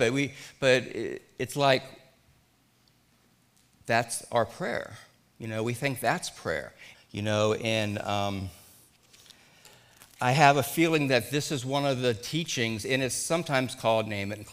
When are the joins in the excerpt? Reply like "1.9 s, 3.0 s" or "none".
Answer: 6.9 s, 12.8 s